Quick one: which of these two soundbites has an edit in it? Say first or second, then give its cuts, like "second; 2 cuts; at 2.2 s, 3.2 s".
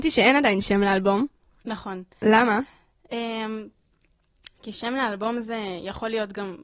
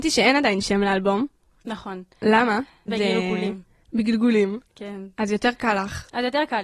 second; 2 cuts; at 2.9 s, 4.7 s